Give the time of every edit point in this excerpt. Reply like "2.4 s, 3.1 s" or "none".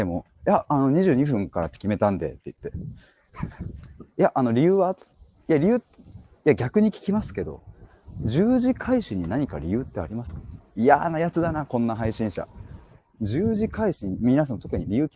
none